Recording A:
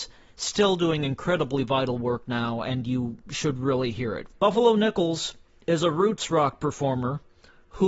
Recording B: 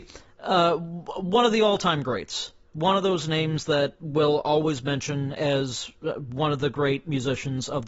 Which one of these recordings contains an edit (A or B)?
A